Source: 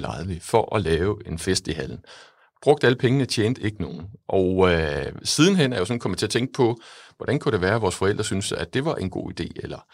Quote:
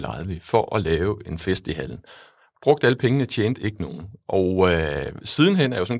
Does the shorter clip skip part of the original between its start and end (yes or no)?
no